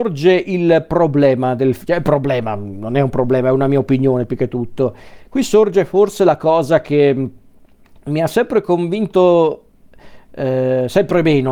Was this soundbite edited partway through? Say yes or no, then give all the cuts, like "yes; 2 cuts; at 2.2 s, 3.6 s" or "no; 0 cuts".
no; 0 cuts